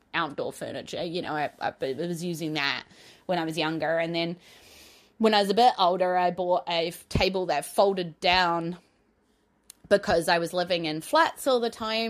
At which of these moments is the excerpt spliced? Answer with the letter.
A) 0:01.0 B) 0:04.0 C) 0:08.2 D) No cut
D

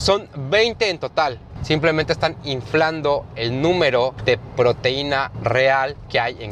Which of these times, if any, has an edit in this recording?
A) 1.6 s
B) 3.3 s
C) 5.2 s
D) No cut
A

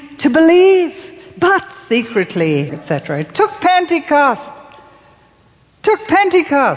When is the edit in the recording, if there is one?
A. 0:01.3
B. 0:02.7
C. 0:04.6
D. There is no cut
B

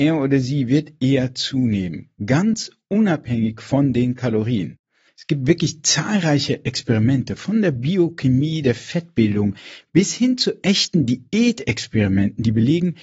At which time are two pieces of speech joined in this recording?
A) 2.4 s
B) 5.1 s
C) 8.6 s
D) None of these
B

